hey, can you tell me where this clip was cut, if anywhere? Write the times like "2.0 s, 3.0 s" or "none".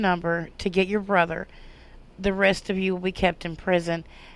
none